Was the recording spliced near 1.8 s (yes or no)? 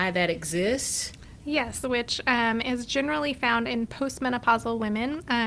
yes